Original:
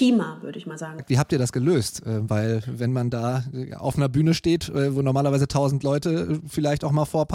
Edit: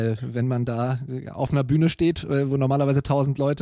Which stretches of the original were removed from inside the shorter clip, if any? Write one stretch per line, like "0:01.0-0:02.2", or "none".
none